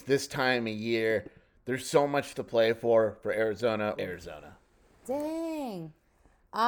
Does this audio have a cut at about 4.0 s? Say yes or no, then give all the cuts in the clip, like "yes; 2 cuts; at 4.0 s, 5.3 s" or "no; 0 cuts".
yes; 1 cut; at 4.0 s